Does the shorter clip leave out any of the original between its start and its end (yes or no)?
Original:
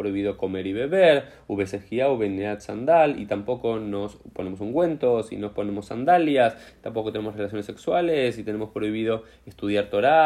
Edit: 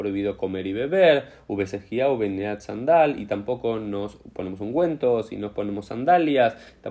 no